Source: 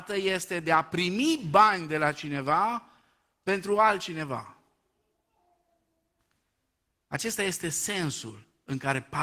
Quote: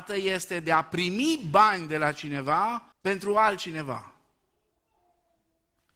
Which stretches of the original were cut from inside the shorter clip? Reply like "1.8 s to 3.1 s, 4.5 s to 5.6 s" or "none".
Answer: 2.9 s to 3.3 s